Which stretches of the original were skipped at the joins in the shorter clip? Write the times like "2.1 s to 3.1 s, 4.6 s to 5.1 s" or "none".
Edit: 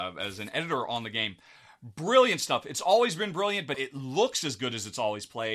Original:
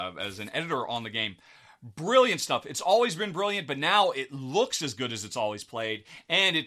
3.7 s to 4.1 s